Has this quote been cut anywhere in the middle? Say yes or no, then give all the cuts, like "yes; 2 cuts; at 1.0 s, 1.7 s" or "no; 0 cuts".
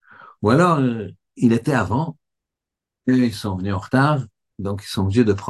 no; 0 cuts